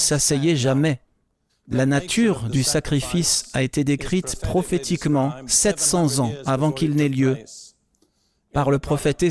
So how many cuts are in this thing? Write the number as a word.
one